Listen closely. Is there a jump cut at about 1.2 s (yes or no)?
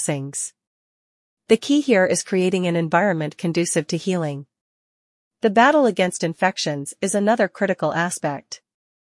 no